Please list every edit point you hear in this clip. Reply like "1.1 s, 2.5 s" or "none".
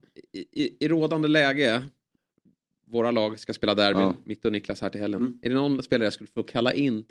none

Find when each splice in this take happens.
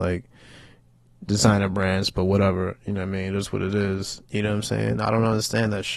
4.2 s

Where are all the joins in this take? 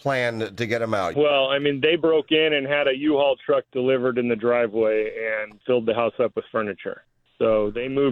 1.1 s, 5.6 s

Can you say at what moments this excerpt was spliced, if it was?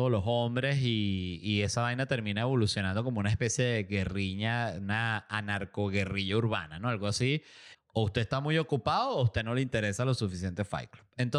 7.7 s

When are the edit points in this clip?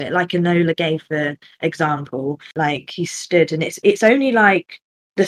2.5 s

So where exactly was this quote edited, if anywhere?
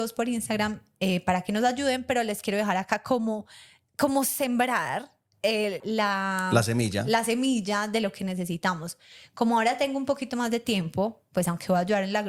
5.8 s

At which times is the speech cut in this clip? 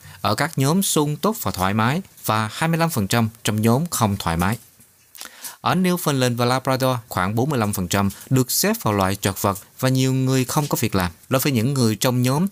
7.1 s, 11.2 s

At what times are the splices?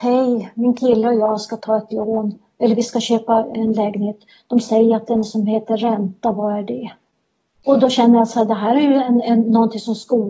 7.5 s

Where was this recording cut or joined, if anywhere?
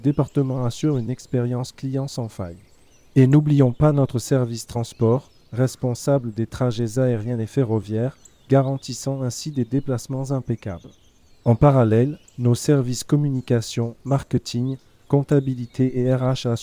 none

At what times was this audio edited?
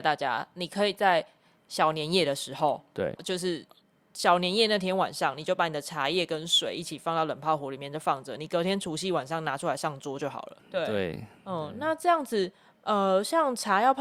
3.2 s, 10.6 s

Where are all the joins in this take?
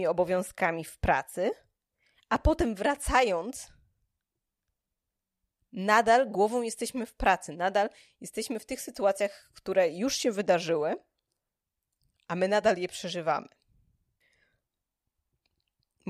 none

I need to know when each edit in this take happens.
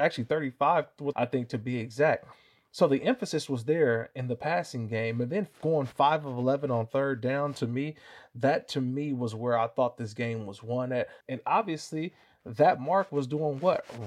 1.1 s, 11.2 s

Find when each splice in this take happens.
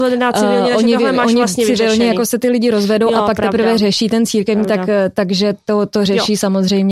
none

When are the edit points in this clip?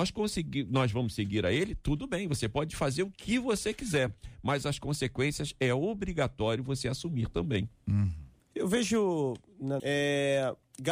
8.4 s, 9.8 s

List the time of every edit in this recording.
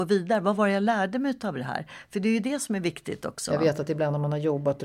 none

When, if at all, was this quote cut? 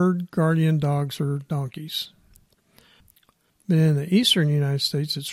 3.5 s

